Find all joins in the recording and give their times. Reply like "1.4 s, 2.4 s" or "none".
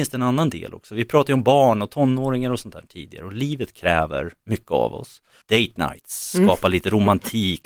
5.4 s